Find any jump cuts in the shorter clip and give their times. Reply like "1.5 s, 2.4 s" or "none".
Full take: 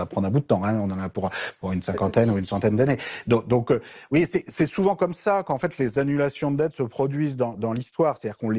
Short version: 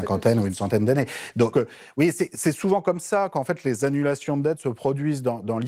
1.5 s